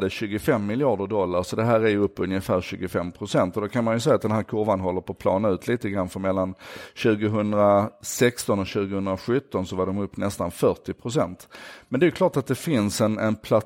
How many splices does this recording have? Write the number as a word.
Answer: zero